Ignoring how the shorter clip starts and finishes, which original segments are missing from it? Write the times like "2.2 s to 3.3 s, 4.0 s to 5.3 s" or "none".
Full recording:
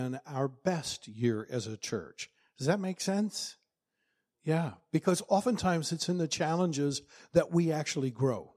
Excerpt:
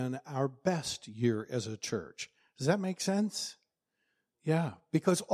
none